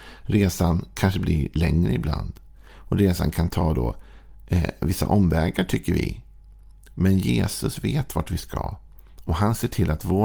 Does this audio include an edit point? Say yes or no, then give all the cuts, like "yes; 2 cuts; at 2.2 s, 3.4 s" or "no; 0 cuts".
no; 0 cuts